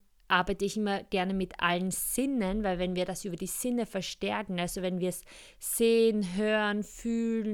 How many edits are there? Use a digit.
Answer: 0